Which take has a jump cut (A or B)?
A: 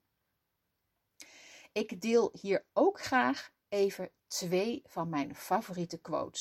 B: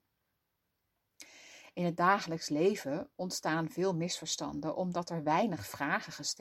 B